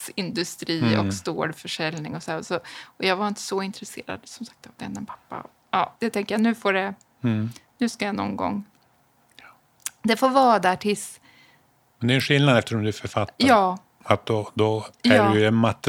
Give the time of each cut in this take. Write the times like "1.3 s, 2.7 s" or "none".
6.0 s